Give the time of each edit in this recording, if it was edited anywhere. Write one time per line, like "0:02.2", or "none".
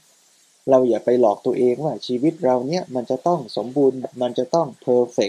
0:04.0